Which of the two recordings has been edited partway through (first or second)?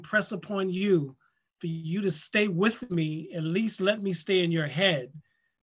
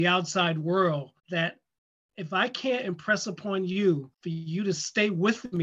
second